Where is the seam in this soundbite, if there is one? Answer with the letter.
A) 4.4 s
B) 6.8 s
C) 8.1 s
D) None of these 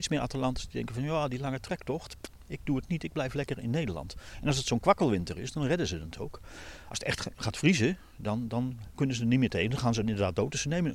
D